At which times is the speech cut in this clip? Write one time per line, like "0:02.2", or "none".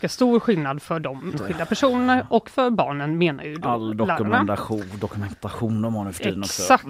0:01.3